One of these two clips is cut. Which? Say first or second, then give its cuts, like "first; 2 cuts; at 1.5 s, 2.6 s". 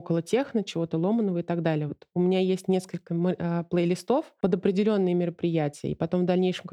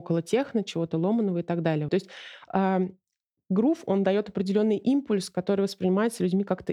second; 1 cut; at 1.9 s